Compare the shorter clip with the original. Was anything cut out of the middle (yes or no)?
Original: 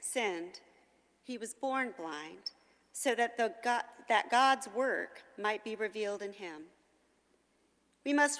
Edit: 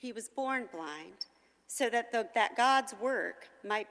yes